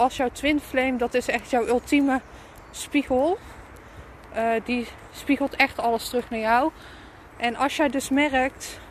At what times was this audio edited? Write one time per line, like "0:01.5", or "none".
0:07.3